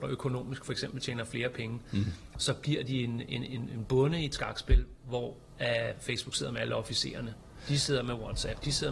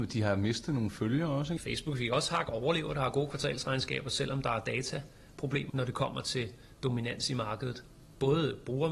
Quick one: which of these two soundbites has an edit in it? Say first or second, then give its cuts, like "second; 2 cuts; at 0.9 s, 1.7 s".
second; 2 cuts; at 1.6 s, 5.7 s